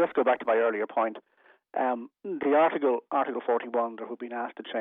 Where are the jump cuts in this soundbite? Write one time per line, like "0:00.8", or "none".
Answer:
none